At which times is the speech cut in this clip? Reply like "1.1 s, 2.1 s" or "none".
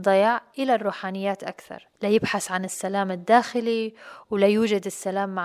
1.9 s